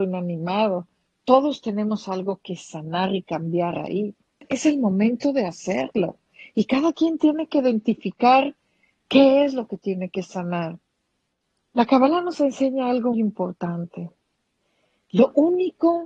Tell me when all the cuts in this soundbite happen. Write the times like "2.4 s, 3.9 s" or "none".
13.1 s

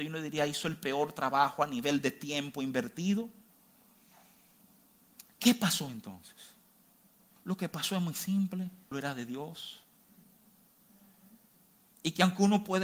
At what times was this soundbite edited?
7.4 s, 8.9 s

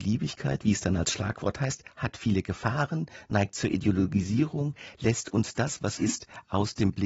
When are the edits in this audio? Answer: 6.0 s

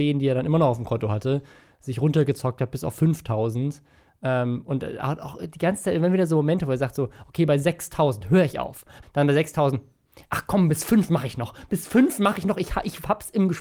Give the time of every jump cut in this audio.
9.0 s

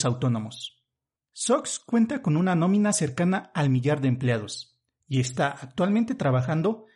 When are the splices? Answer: none

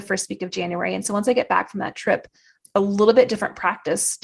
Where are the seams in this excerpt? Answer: 2.6 s

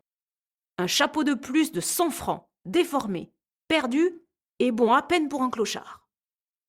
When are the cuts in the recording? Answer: none

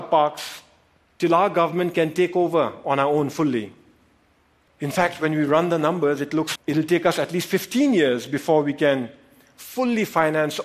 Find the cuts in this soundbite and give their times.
1.1 s, 4.7 s, 6.6 s

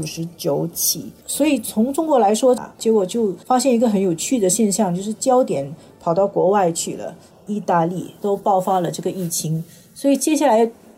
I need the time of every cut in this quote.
2.6 s, 7.3 s

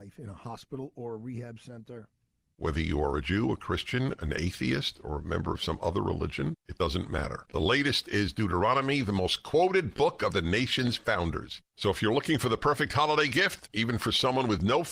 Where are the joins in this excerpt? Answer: 2.5 s, 7.5 s

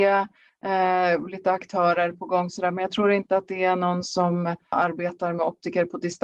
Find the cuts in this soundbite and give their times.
4.7 s

